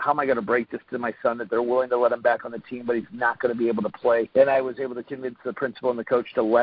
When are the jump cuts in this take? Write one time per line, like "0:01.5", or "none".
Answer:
0:04.3